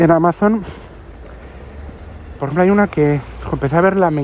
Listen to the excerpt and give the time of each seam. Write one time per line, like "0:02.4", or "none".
0:02.4